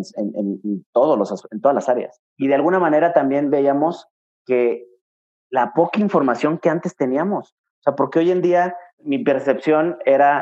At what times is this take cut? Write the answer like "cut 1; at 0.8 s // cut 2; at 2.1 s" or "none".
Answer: cut 1; at 2.3 s